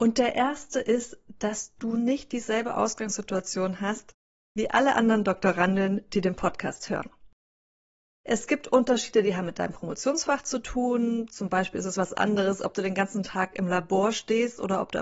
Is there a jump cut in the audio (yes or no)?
no